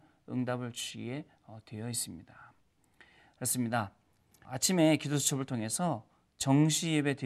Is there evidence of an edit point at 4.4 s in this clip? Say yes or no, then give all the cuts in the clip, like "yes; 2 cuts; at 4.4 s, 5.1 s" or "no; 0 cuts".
yes; 1 cut; at 4.4 s